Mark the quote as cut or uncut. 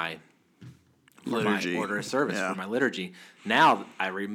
uncut